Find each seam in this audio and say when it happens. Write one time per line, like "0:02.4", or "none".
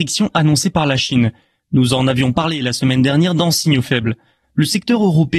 0:04.4